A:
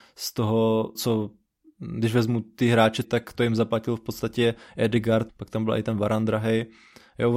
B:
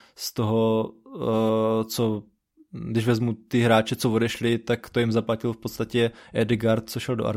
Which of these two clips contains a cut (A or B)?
A